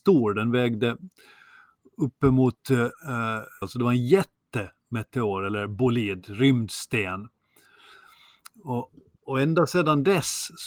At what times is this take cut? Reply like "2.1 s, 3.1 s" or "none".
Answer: 3.6 s